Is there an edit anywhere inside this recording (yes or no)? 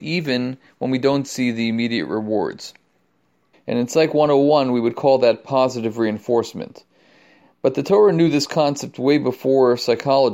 yes